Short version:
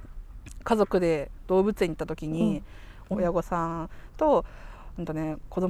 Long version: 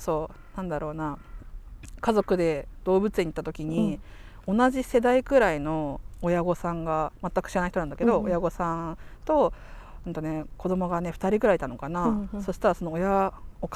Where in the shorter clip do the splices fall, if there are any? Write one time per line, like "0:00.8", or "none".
0:03.1